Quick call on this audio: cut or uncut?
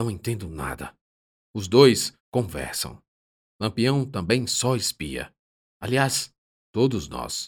cut